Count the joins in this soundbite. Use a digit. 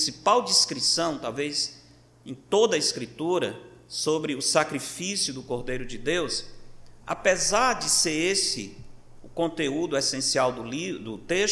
0